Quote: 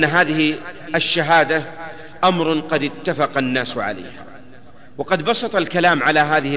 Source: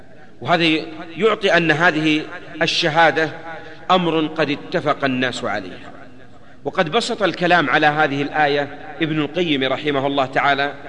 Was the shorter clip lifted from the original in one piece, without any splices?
yes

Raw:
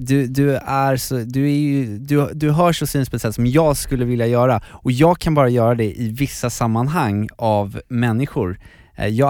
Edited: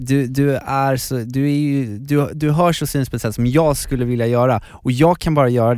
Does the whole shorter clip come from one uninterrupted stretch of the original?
yes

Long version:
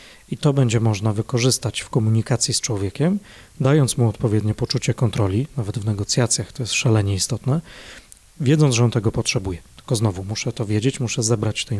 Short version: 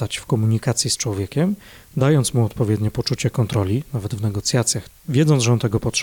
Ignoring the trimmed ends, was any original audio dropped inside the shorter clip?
yes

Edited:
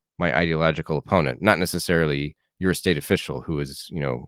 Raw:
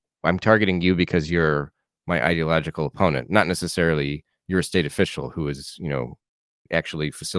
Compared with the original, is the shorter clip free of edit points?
yes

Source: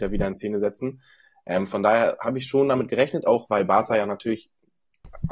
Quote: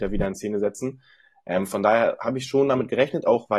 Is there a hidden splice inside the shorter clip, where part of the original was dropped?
no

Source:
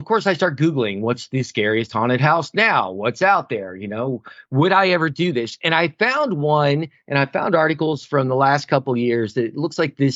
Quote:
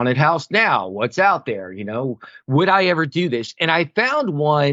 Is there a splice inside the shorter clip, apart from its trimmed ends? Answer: no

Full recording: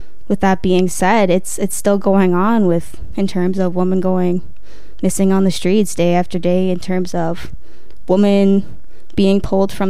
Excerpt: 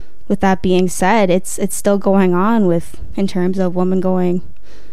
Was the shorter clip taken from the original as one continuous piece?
yes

